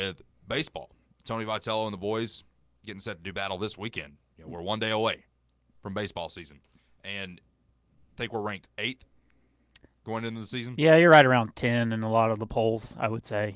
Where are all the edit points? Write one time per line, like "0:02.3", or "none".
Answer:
none